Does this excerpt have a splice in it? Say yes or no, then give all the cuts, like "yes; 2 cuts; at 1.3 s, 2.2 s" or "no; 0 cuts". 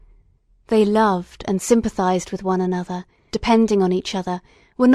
yes; 1 cut; at 3.3 s